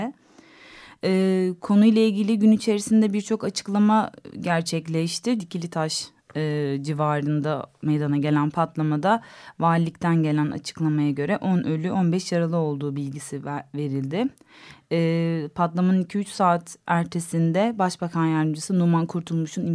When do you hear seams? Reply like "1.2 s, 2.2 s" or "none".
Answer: 5.4 s

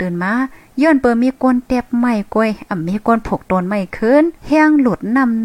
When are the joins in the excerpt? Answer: 4.4 s

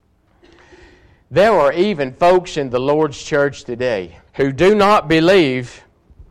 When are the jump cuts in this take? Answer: 4.3 s

